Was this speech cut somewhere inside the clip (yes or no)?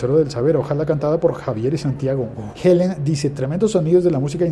yes